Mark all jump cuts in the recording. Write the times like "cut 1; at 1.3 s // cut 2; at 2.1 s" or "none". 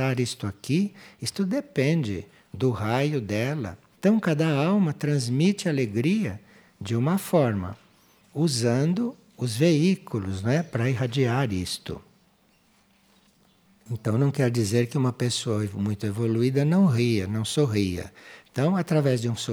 cut 1; at 3.9 s // cut 2; at 18.4 s